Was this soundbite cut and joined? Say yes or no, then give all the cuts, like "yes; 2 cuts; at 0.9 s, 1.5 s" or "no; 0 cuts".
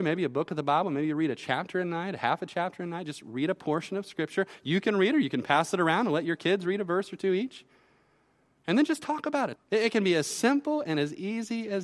yes; 1 cut; at 9.6 s